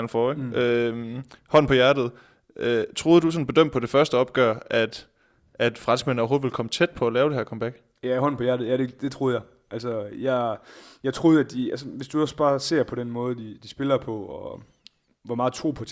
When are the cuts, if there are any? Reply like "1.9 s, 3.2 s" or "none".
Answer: none